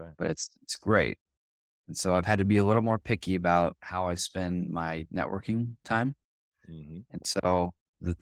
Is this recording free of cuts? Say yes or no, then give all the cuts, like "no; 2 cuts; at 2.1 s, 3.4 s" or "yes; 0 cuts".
yes; 0 cuts